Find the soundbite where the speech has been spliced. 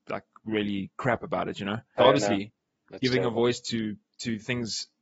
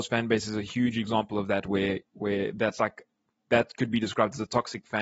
first; 1 cut; at 2.0 s

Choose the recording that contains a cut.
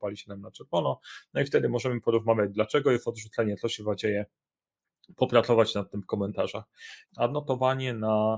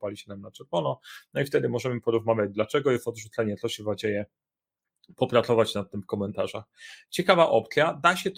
first; 1 cut; at 7.0 s

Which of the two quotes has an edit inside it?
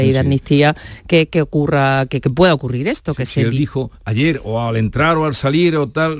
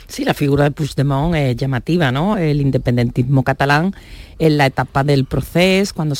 second; 1 cut; at 2.3 s

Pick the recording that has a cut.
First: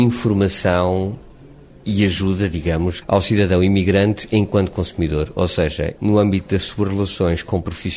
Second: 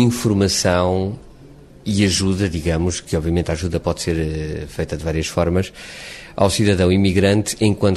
first; 2 cuts; at 3.0 s, 6.0 s

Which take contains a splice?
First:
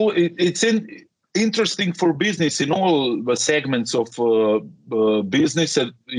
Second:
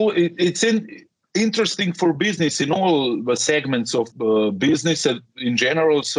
second; 1 cut; at 4.1 s

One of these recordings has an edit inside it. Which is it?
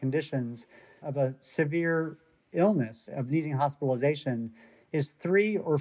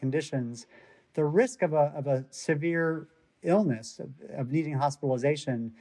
first; 2 cuts; at 1.0 s, 3.1 s

